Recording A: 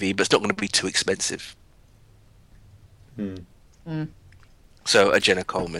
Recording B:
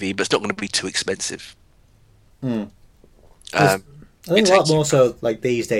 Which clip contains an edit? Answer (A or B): B